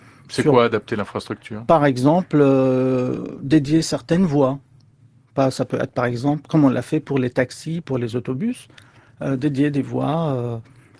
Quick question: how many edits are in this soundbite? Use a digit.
1